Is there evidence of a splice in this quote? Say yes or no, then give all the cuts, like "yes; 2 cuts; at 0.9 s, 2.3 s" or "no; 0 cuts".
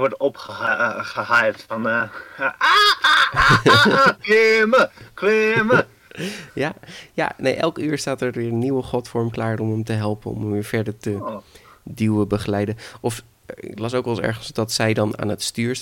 no; 0 cuts